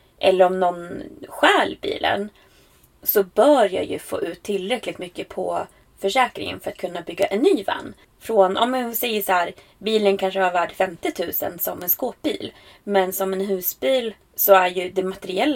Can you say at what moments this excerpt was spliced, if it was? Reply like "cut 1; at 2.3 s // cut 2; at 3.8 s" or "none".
cut 1; at 8.0 s // cut 2; at 14.2 s